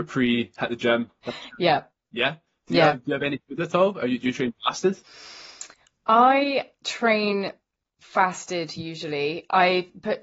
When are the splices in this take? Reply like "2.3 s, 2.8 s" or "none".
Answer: none